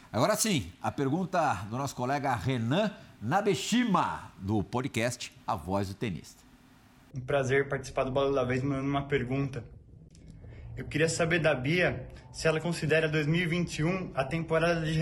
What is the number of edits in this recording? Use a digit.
1